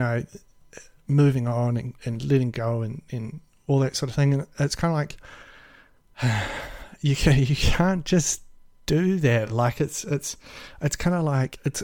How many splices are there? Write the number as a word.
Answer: zero